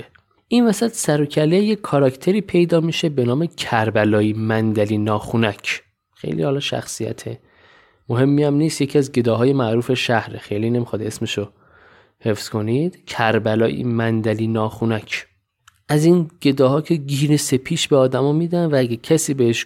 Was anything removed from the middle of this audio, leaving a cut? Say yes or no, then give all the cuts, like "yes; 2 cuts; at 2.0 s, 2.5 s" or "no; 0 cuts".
no; 0 cuts